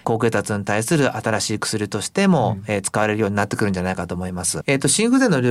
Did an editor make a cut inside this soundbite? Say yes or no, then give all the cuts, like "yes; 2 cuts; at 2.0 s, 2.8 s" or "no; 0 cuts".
yes; 1 cut; at 4.6 s